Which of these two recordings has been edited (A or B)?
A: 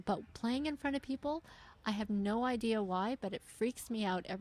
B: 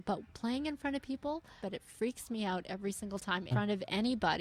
B